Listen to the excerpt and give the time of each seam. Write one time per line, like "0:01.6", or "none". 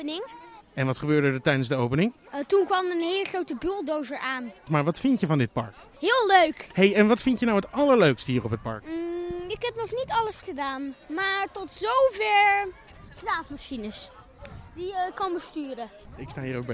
0:11.0